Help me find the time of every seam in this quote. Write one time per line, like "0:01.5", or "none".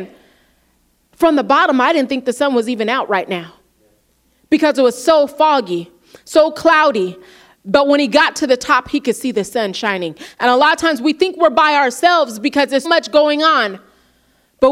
0:12.8